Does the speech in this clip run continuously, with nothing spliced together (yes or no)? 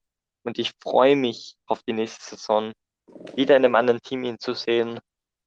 no